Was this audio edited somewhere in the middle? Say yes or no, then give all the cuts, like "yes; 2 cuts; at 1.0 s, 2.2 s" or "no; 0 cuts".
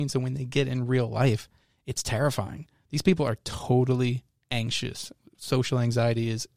no; 0 cuts